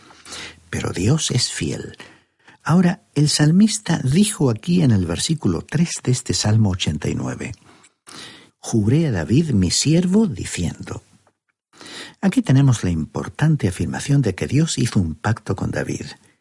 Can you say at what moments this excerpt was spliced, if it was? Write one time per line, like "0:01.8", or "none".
0:08.5

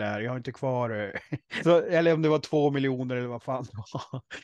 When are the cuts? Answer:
0:01.6

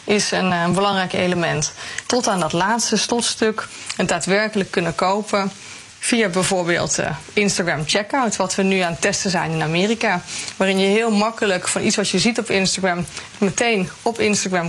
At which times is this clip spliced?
0:02.0

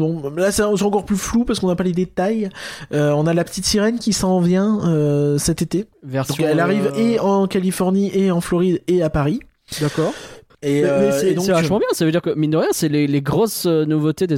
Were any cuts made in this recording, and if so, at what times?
0:06.9
0:10.5

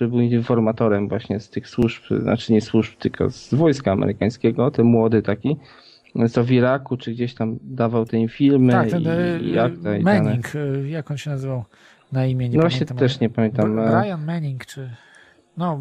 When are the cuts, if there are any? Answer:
none

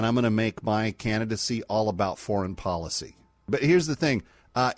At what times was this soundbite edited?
none

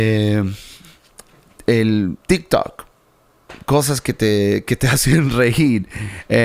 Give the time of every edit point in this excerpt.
0:02.2

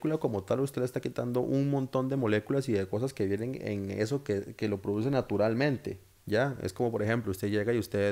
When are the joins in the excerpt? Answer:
0:06.2

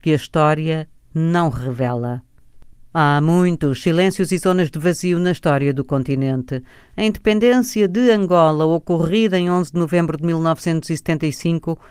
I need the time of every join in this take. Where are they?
none

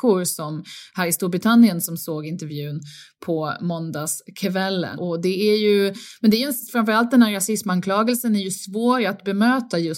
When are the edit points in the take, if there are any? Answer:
0:05.0

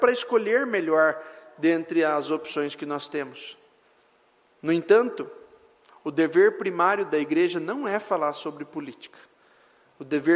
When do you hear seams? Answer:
none

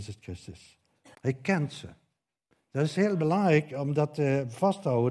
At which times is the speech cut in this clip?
0:01.1

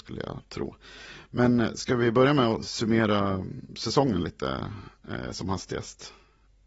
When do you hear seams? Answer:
none

